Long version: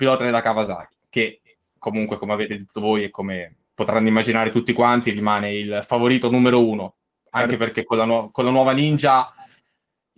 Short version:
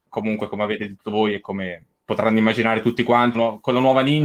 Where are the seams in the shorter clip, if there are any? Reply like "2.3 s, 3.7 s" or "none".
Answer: 3.3 s